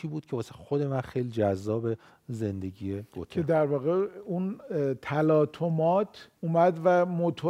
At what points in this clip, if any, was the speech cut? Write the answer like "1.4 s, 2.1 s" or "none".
6.4 s